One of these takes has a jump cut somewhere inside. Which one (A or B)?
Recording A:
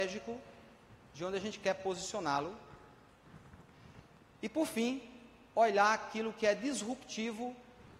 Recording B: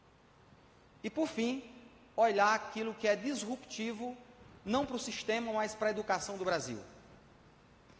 A